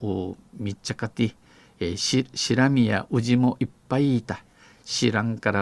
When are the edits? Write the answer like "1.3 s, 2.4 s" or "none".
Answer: none